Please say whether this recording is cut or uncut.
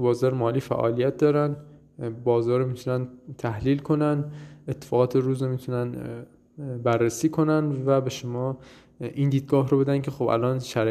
uncut